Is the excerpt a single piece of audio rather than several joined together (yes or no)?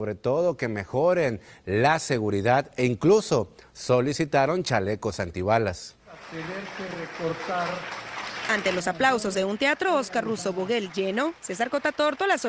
yes